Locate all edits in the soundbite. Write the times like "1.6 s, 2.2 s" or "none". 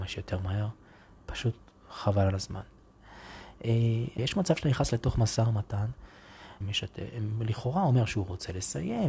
4.2 s, 6.6 s